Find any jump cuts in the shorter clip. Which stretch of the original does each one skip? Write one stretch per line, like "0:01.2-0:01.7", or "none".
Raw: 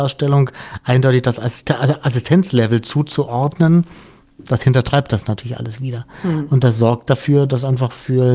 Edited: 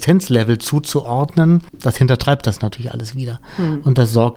0:03.9-0:04.3